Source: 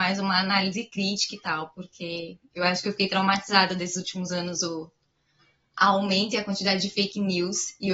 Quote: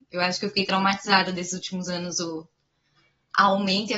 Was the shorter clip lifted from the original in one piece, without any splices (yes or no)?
yes